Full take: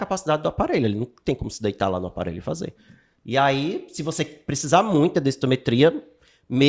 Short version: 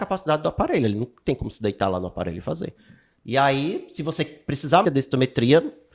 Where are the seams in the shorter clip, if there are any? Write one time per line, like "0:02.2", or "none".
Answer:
0:04.8